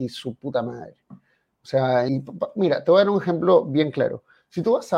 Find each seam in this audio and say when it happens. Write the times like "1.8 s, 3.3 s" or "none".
2.1 s